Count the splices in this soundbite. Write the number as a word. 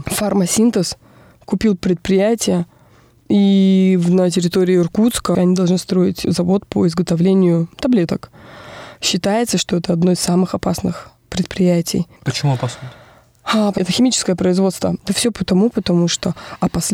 three